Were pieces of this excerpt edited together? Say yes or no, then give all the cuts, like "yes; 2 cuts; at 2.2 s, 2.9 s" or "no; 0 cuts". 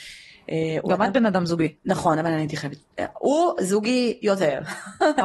no; 0 cuts